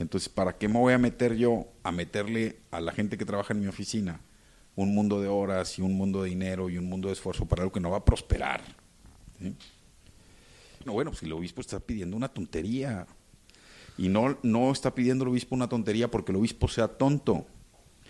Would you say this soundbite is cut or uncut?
cut